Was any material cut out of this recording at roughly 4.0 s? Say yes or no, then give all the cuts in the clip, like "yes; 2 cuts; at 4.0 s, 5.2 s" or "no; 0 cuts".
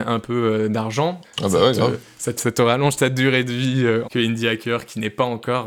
yes; 3 cuts; at 1.2 s, 2.4 s, 4.0 s